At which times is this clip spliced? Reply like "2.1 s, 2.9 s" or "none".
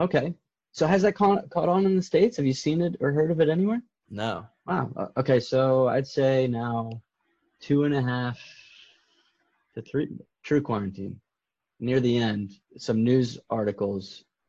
10.2 s, 12.6 s